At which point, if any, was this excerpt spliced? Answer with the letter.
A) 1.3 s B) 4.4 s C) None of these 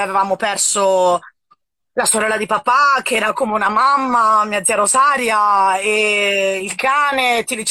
C